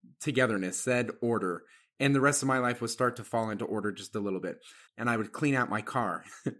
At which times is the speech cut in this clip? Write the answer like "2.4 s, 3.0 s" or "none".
4.9 s